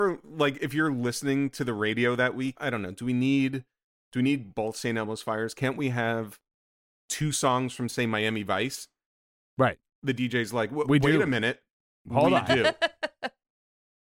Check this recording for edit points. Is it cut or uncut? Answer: cut